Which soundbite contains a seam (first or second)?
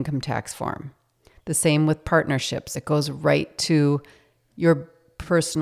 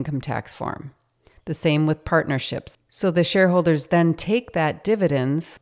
second